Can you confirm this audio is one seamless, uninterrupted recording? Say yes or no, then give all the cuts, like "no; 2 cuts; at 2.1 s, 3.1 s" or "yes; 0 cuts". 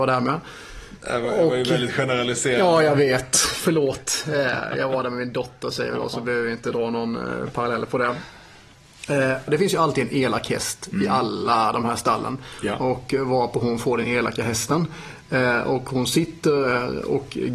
no; 1 cut; at 9.5 s